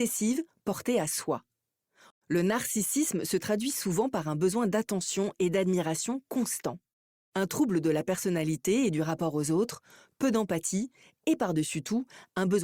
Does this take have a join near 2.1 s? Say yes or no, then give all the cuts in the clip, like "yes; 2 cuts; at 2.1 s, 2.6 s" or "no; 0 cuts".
yes; 1 cut; at 2.1 s